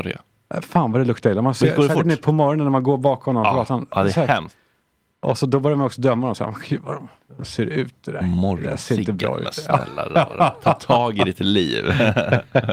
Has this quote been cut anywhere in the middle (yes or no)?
no